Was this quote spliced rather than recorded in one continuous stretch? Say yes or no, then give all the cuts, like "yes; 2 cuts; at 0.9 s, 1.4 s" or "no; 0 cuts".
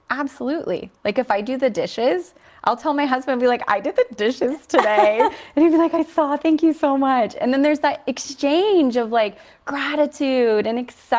no; 0 cuts